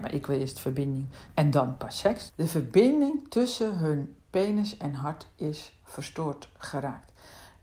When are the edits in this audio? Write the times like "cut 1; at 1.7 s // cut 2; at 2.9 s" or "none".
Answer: cut 1; at 2.3 s